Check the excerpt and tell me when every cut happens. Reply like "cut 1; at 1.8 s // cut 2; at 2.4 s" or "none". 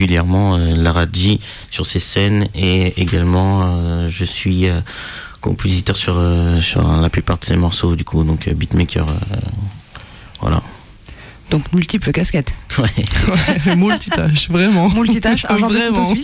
none